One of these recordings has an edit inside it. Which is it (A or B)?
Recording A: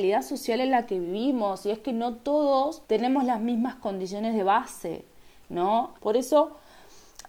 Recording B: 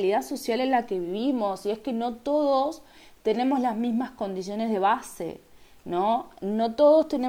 A